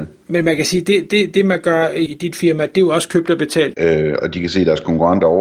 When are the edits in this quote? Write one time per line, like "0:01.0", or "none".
0:02.1
0:03.7